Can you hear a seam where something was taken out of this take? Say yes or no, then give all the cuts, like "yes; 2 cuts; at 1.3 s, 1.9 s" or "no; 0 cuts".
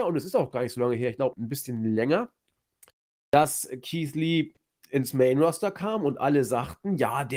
yes; 1 cut; at 1.3 s